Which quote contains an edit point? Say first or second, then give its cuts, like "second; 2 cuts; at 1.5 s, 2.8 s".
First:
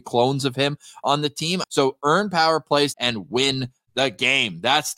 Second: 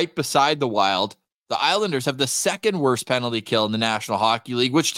first; 2 cuts; at 1.6 s, 2.9 s